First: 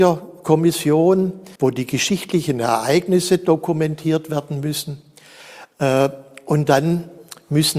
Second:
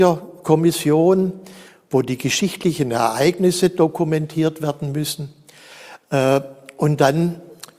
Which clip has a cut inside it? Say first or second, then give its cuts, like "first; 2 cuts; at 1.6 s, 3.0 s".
first; 1 cut; at 1.6 s